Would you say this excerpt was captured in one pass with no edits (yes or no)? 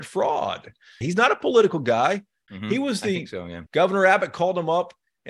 no